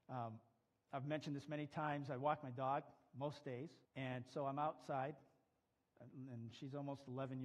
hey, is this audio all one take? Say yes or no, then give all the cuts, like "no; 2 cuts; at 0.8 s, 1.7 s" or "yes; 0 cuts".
no; 1 cut; at 3.9 s